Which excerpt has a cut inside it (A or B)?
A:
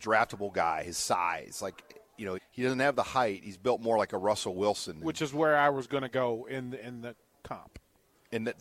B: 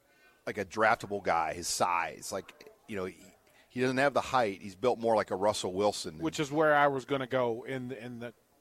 A